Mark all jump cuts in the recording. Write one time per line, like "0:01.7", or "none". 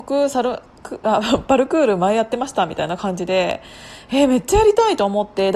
none